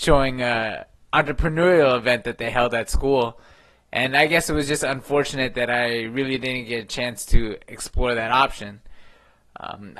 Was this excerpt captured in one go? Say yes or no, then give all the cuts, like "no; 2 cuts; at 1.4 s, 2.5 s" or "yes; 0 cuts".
yes; 0 cuts